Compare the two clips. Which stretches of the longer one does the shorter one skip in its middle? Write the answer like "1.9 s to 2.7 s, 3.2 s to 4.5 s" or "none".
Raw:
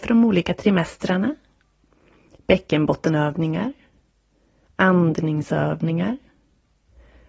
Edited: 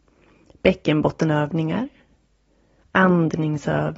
none

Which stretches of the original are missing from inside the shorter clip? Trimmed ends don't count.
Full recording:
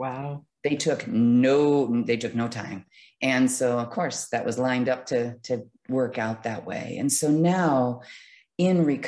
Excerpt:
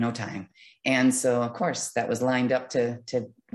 none

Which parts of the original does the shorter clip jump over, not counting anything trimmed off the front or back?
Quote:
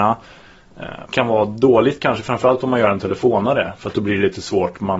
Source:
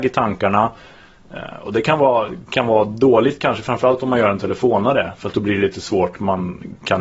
1.6 s to 2.5 s

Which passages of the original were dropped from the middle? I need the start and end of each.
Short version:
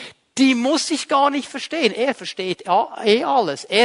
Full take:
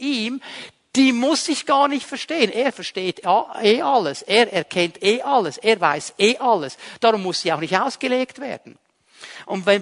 none

